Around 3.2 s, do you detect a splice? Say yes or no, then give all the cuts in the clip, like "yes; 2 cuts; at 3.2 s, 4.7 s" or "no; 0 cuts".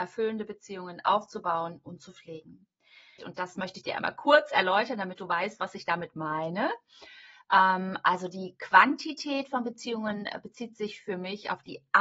yes; 1 cut; at 3.2 s